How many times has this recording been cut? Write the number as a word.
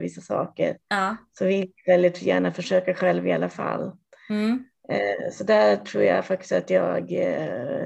zero